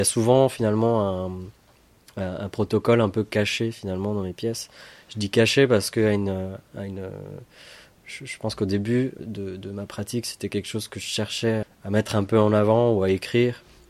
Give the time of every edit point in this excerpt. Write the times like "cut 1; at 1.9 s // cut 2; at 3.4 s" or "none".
cut 1; at 9.2 s // cut 2; at 11.6 s